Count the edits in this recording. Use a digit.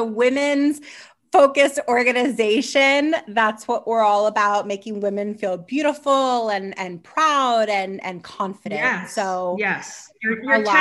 0